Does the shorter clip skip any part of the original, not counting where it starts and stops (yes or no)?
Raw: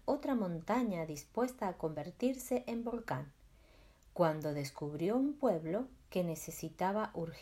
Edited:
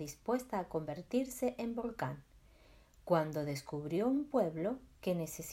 no